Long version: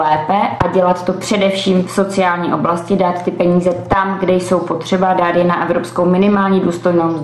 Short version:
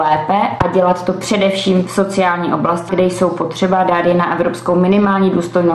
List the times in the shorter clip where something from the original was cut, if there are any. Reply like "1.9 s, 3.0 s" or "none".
2.9 s